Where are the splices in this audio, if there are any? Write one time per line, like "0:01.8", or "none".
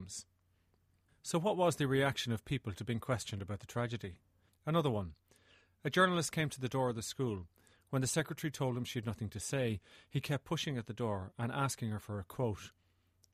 0:04.5